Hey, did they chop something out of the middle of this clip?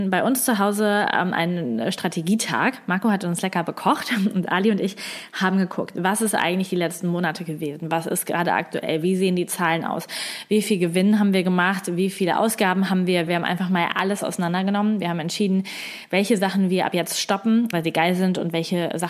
yes; 2 cuts; at 13.3 s, 17.7 s

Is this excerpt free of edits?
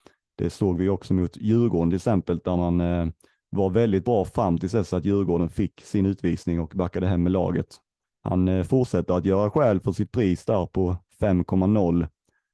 no; 1 cut; at 8.1 s

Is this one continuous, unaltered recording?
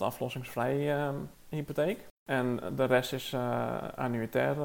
yes; 0 cuts

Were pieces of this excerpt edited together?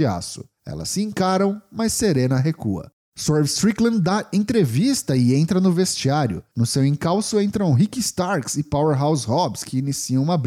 no; 0 cuts

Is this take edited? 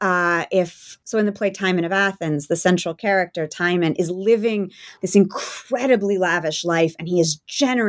yes; 2 cuts; at 1.0 s, 5.0 s

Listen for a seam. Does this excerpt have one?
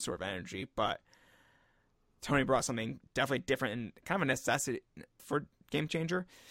yes; 1 cut; at 5.2 s

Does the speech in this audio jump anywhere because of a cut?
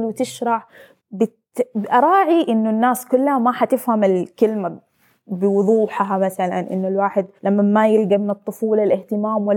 yes; 2 cuts; at 1.0 s, 7.4 s

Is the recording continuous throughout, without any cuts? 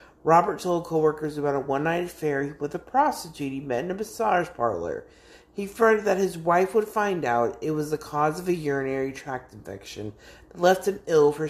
yes; 0 cuts

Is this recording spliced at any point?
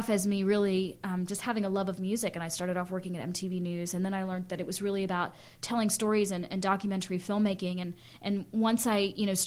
no; 0 cuts

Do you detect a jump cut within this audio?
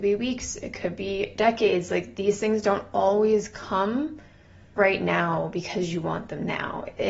no; 0 cuts

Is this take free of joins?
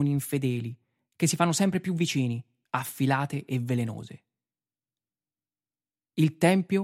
no; 1 cut; at 2.7 s

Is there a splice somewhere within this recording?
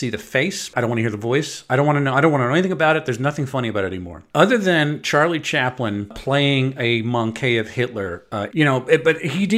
yes; 1 cut; at 8.5 s

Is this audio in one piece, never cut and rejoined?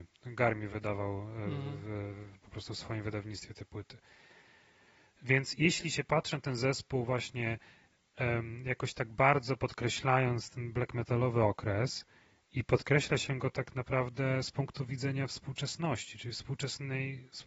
yes; 0 cuts

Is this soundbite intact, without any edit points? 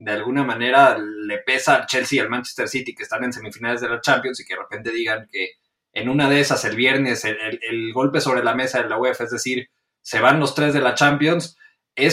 yes; 0 cuts

